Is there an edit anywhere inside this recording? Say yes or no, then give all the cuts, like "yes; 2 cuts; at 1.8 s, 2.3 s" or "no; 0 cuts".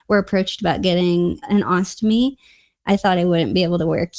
yes; 1 cut; at 1.4 s